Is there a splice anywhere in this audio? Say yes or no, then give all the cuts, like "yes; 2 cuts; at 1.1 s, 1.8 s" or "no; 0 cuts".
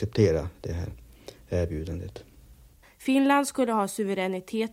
yes; 1 cut; at 2.8 s